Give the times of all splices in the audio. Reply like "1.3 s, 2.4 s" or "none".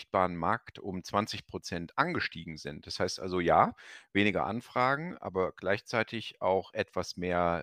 none